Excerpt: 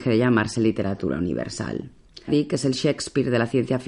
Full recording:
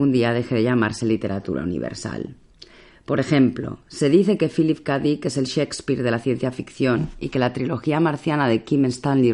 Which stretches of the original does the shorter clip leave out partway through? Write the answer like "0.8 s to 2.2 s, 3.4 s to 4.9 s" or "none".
2.7 s to 5.0 s

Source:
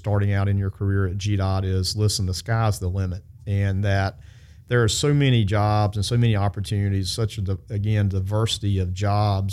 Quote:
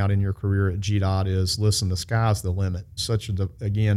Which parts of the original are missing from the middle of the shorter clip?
3.3 s to 7.1 s

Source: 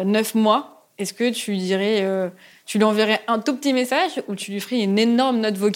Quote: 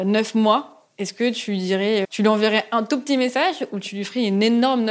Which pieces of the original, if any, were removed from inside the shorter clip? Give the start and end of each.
2.0 s to 2.6 s

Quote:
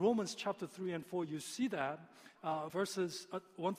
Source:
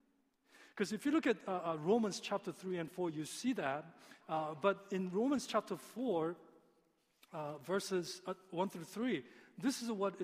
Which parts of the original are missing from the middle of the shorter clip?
4.5 s to 7.6 s

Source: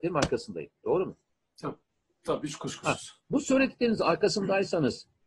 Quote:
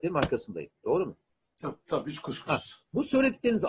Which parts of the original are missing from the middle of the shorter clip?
1.8 s to 2.2 s

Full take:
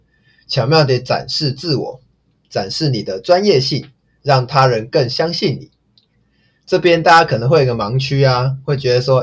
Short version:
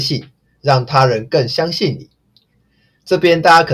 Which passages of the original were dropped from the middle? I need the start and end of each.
none

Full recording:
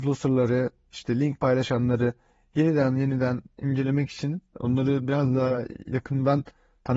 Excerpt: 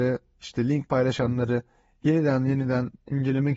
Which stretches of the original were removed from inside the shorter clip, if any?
none

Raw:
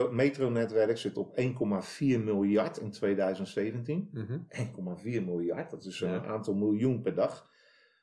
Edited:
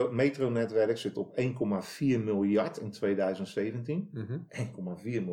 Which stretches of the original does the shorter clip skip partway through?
none

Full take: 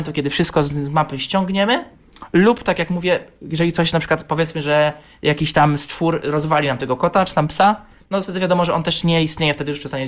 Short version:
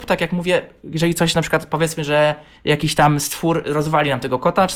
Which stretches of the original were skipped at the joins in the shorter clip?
none

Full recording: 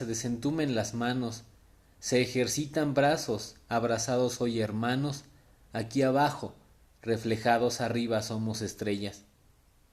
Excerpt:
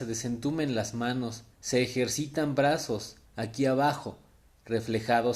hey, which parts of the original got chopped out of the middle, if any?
1.5 s to 1.9 s, 3.6 s to 5.6 s

